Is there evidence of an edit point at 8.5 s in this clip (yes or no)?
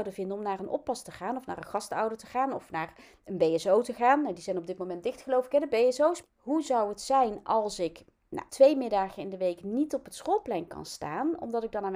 yes